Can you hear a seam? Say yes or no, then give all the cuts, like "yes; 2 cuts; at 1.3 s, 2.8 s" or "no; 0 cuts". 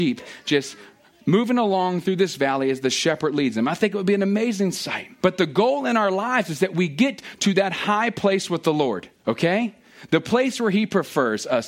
yes; 2 cuts; at 5.2 s, 9.2 s